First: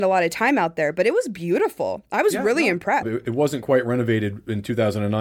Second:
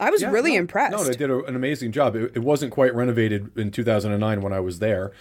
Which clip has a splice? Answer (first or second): first